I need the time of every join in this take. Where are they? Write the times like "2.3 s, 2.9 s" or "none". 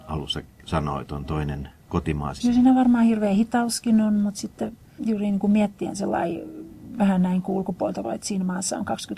2.4 s, 5.0 s, 8.0 s